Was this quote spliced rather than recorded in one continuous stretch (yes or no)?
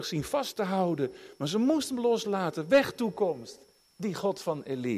yes